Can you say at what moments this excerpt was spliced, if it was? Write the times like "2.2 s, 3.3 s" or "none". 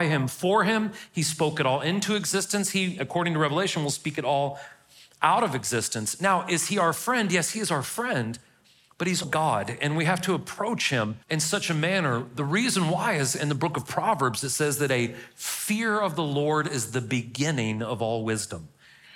9.2 s, 11.2 s